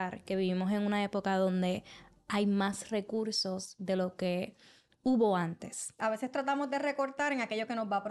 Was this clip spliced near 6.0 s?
yes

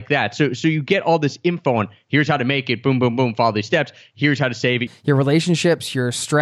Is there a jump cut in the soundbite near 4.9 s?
yes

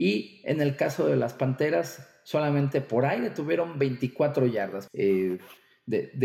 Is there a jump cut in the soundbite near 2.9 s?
no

